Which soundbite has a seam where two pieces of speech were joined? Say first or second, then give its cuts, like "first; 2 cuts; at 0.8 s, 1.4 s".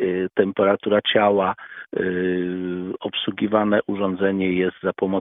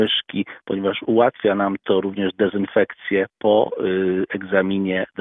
second; 1 cut; at 3.3 s